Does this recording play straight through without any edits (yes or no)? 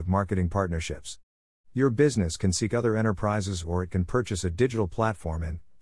yes